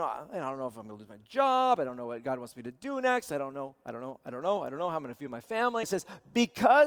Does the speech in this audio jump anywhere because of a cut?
yes; 1 cut; at 5.8 s

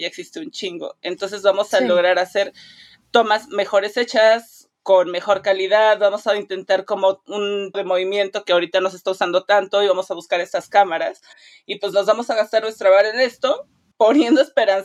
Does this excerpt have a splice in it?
yes; 1 cut; at 7.7 s

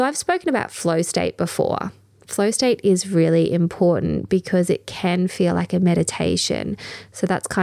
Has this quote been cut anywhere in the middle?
no; 0 cuts

